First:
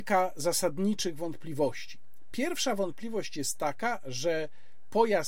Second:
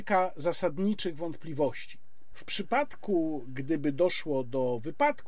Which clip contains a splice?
second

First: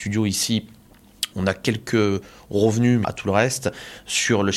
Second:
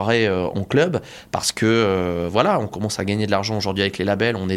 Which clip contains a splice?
first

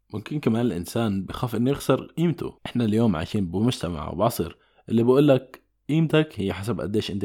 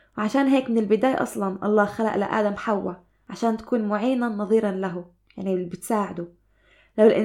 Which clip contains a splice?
first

